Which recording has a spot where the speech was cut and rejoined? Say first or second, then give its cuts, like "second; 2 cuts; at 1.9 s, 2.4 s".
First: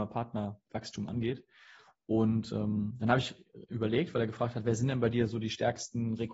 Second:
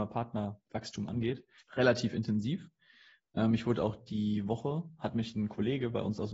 second; 1 cut; at 1.6 s